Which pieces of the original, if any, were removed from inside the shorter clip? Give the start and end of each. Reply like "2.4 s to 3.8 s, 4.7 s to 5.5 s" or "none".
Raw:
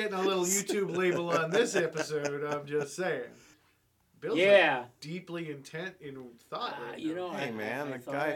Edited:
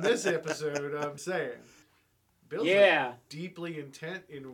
2.7 s to 2.9 s